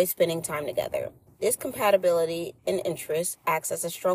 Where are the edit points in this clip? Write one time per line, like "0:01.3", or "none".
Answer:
0:01.3
0:02.6